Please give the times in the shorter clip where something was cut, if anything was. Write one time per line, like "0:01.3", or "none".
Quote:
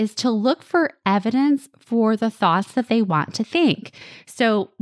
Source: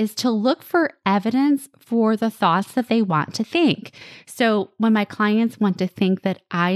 none